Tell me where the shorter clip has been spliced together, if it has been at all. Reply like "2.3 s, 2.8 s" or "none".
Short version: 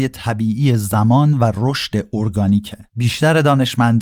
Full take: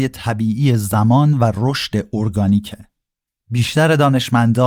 2.9 s